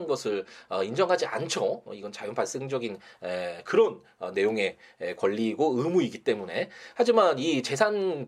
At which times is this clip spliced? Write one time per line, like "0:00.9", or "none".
none